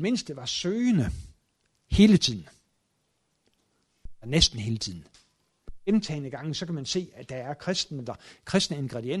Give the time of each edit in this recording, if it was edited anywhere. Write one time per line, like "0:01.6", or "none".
none